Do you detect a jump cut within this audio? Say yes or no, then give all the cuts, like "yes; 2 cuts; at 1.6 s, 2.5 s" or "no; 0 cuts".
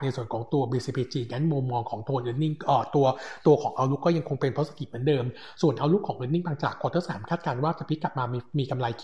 no; 0 cuts